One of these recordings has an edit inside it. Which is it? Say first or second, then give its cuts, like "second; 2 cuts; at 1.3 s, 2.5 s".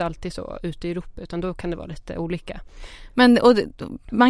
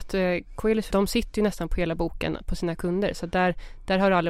second; 1 cut; at 0.9 s